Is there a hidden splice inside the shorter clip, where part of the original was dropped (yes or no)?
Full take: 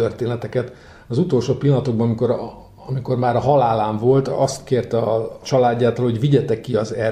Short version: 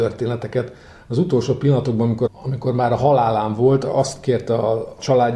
yes